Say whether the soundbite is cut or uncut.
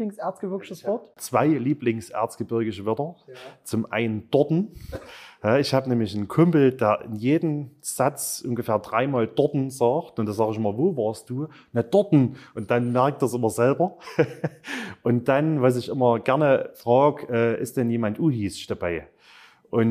uncut